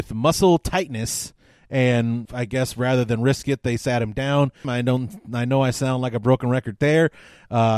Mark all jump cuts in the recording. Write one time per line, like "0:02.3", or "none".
0:02.3
0:04.6